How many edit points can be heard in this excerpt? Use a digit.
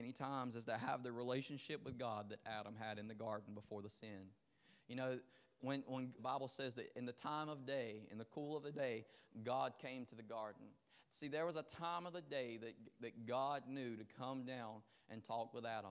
1